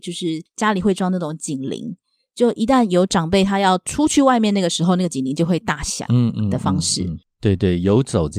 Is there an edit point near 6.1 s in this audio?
no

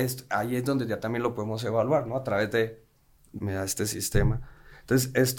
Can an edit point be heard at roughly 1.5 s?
no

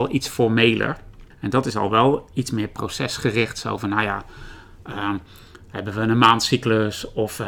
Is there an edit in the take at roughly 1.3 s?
yes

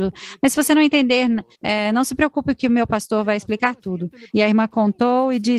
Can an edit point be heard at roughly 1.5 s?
yes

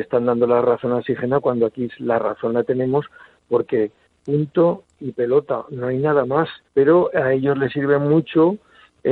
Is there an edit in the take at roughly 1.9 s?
no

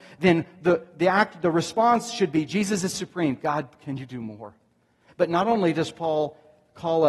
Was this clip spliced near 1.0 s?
no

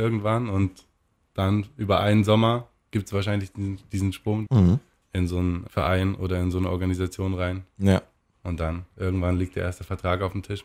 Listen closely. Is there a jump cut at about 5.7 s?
yes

